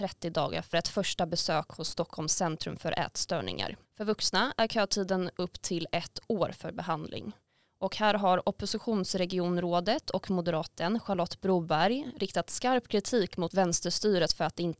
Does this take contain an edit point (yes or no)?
yes